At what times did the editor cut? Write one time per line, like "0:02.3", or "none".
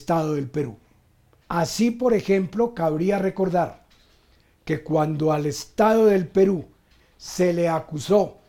0:01.4
0:07.0